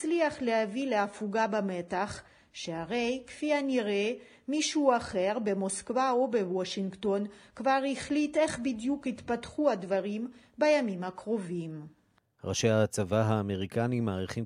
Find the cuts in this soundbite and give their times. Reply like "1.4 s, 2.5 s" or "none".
12.4 s